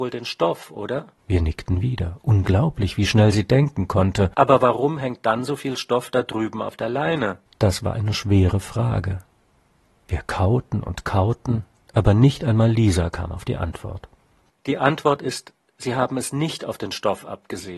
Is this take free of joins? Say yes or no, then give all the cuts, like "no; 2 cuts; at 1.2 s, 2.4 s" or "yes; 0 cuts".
yes; 0 cuts